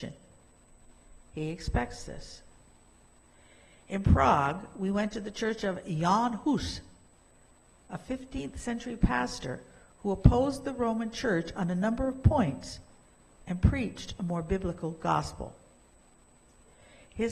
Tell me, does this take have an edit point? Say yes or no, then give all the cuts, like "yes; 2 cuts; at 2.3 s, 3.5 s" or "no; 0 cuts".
no; 0 cuts